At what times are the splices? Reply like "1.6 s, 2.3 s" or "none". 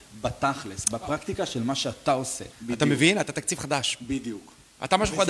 2.5 s